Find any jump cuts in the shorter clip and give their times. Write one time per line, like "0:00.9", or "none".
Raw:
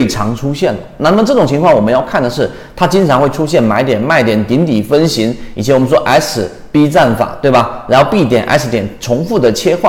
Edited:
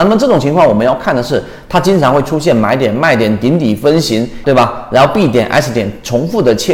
0:04.4